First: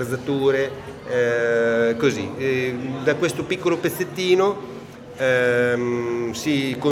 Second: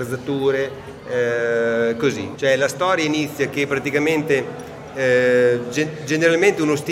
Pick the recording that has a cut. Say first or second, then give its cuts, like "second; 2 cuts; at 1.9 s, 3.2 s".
second; 1 cut; at 2.4 s